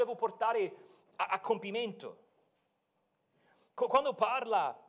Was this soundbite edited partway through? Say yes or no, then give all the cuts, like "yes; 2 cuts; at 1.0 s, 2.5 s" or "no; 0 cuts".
no; 0 cuts